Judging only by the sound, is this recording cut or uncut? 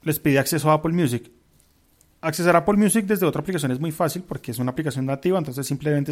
uncut